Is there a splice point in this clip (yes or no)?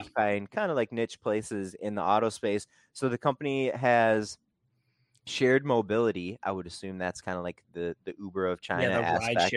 no